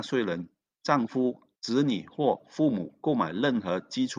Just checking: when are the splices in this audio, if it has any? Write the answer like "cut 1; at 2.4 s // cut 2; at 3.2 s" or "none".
cut 1; at 1.5 s